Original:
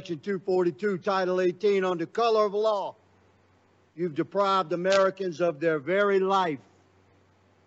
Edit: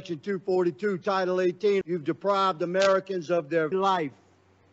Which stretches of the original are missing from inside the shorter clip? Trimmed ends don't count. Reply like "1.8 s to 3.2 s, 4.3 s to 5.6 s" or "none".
1.8 s to 3.9 s, 5.8 s to 6.2 s